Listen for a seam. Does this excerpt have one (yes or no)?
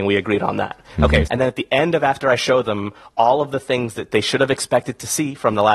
yes